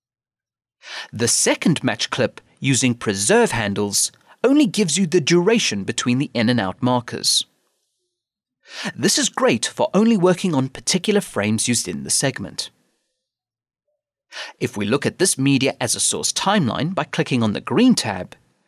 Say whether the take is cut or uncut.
uncut